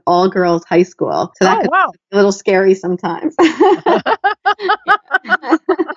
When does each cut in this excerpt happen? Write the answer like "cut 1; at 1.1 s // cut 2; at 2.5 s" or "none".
none